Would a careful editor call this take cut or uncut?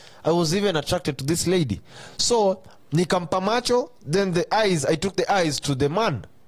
uncut